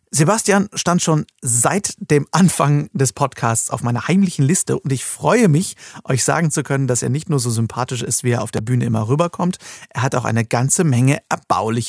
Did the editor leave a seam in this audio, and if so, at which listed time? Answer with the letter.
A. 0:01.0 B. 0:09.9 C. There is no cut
C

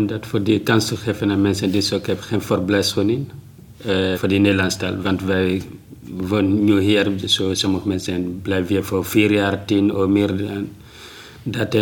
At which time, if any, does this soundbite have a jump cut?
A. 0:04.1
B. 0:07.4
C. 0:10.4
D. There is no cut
A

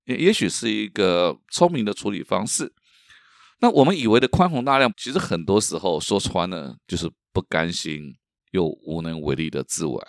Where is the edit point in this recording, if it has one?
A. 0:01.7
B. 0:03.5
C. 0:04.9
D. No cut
C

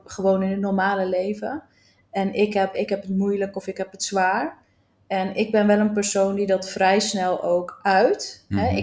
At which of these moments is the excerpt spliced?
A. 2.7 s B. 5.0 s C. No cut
A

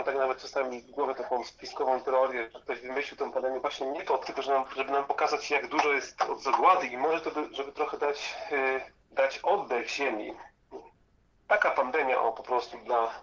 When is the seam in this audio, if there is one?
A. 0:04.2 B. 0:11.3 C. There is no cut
A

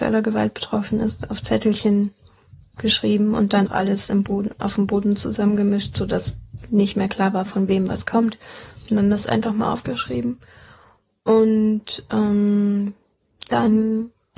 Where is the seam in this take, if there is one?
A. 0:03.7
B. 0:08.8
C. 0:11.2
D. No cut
A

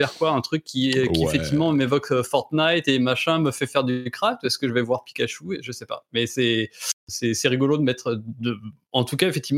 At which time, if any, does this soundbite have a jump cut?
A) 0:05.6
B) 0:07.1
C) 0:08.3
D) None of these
B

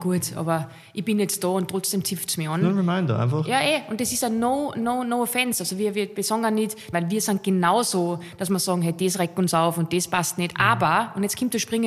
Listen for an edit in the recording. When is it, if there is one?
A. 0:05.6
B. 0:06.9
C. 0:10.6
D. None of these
B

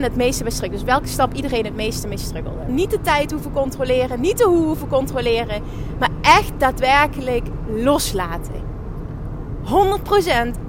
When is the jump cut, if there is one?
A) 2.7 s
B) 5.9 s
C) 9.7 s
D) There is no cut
A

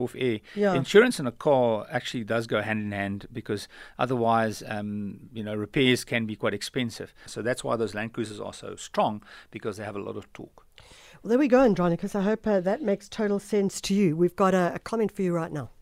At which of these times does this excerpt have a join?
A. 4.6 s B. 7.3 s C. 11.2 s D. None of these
B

